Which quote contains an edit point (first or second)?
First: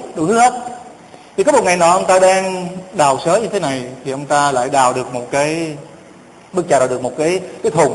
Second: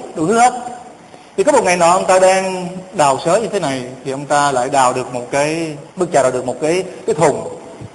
second